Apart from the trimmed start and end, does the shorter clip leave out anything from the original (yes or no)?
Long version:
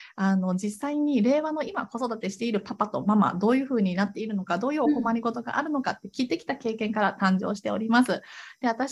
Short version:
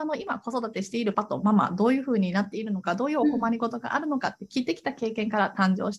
yes